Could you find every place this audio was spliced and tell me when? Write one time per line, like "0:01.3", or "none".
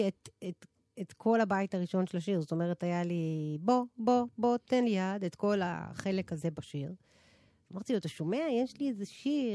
none